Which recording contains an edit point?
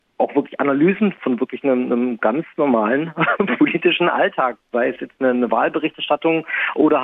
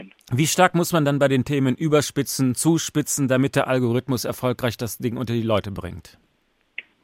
first; 1 cut; at 1.2 s

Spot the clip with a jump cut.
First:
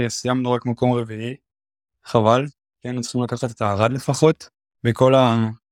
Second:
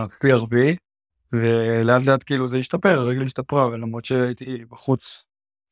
first; 1 cut; at 4.8 s

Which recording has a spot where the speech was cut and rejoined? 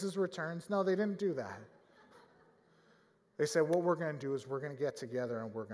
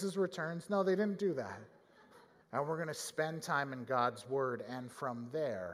second; 1 cut; at 2.4 s

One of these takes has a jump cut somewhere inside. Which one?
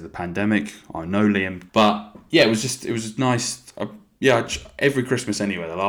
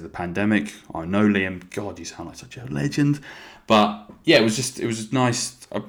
first; 1 cut; at 1.7 s

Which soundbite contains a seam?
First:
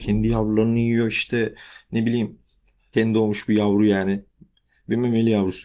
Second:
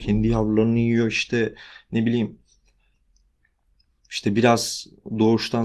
first; 1 cut; at 2.9 s

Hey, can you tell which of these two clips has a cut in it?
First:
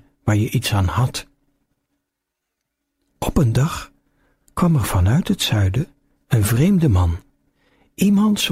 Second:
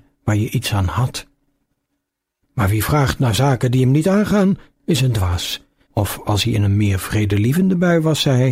second; 2 cuts; at 2.4 s, 5.8 s

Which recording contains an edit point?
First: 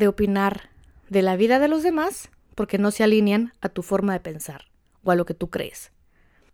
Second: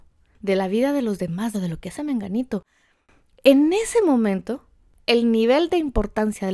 second; 1 cut; at 1.5 s

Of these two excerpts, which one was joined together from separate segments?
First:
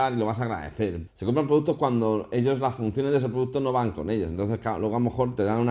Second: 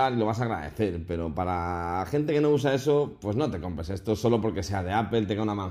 first; 1 cut; at 1.1 s

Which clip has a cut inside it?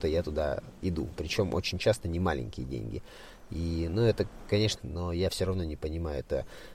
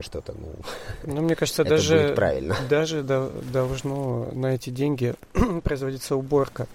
first; 1 cut; at 4.8 s

